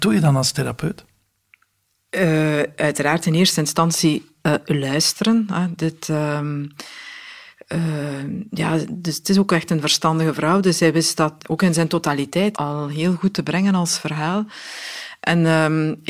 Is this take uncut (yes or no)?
no